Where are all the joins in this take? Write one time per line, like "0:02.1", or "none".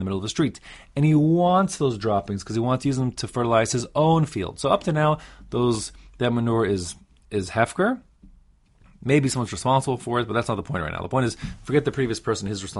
none